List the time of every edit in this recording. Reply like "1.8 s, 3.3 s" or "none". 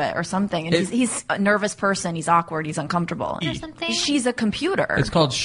3.4 s